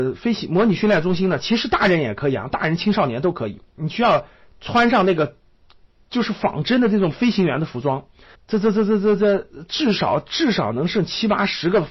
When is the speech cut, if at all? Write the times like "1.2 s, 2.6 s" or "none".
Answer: 8.3 s

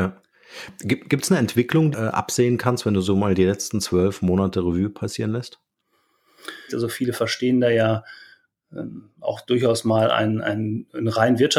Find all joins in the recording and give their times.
1.9 s, 6.7 s

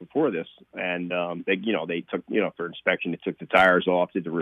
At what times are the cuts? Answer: none

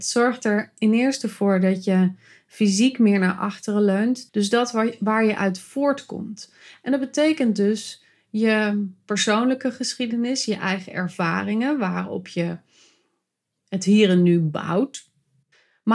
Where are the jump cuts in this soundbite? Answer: 4.3 s

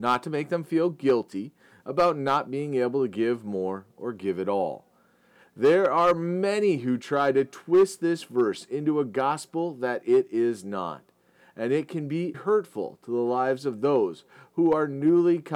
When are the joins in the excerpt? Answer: 5.4 s, 12.3 s

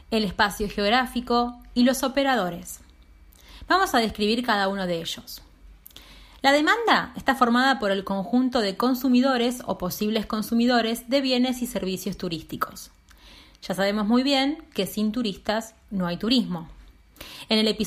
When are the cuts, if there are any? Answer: none

